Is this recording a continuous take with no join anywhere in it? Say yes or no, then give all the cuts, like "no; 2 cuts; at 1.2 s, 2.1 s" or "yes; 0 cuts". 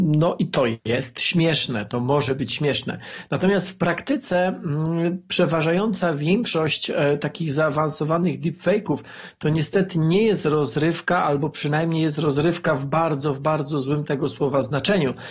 yes; 0 cuts